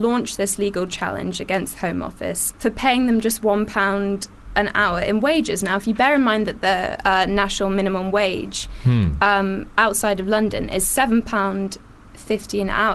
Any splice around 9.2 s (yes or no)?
no